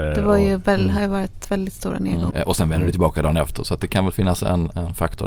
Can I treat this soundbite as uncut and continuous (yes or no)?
no